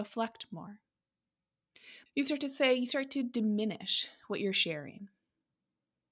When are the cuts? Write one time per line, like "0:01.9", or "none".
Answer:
0:02.1